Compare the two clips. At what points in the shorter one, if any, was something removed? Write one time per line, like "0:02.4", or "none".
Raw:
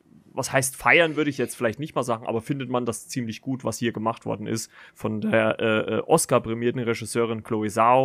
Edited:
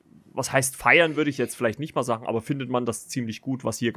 none